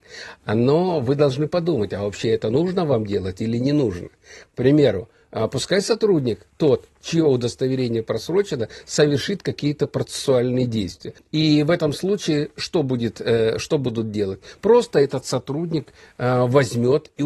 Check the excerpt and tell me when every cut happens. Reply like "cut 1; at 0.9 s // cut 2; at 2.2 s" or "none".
cut 1; at 11.2 s